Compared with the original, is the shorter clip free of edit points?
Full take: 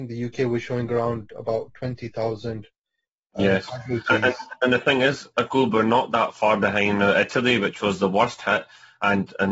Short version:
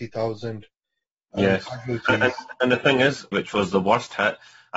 no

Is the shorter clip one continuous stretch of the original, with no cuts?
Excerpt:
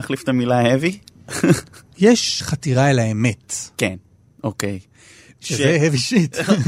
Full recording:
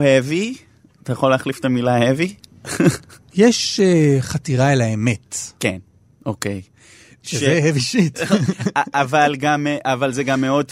no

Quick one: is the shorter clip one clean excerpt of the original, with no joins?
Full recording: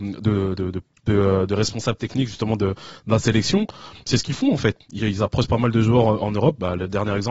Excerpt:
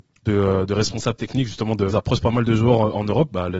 no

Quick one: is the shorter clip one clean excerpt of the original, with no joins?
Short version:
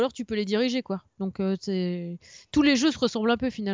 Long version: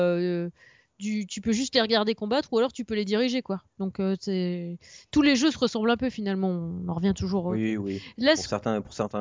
yes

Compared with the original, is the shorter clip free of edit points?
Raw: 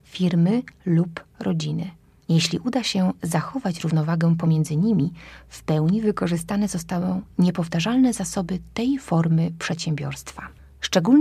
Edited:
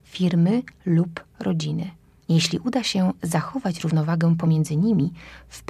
yes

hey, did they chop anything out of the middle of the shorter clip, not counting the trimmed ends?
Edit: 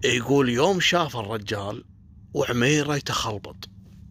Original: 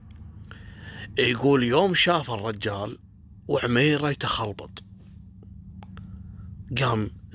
no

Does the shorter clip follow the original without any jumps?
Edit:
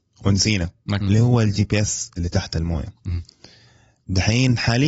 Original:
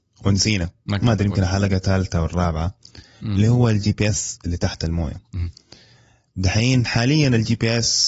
no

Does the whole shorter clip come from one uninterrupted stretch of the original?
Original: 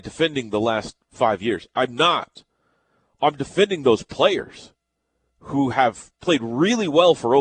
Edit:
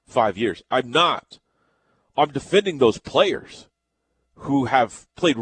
yes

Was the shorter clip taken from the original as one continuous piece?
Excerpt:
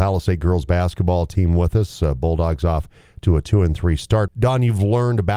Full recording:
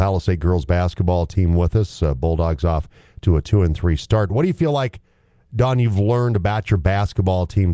no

